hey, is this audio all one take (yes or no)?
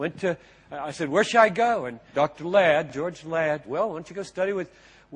no